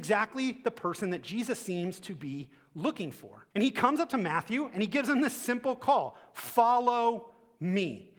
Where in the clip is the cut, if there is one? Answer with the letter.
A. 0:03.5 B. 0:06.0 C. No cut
A